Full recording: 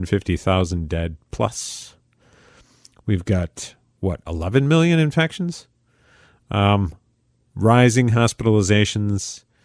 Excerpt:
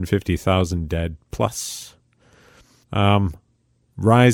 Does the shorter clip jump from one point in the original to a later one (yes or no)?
yes